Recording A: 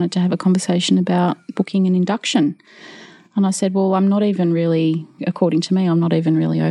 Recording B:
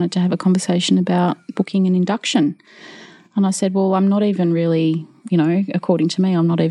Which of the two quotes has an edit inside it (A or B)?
A